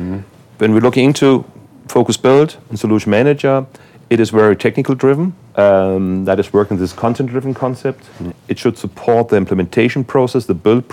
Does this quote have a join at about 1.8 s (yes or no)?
no